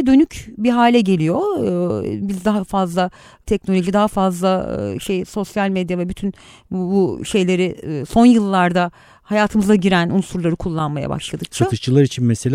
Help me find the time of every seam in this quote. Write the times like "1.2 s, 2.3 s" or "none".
none